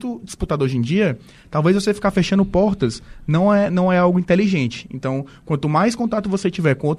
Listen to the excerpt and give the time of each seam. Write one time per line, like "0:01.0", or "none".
none